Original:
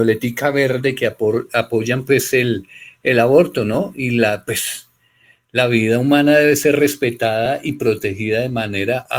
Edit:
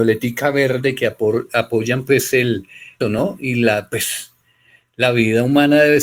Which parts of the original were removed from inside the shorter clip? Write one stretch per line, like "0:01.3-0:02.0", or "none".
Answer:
0:03.0-0:03.6